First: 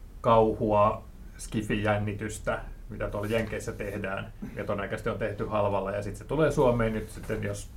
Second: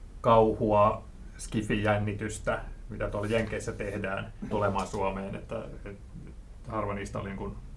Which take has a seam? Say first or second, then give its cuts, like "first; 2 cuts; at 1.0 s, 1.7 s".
second; 1 cut; at 4.5 s